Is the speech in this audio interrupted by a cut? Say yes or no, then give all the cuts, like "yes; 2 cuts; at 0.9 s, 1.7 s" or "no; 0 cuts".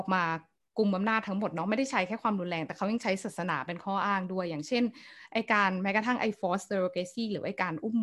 no; 0 cuts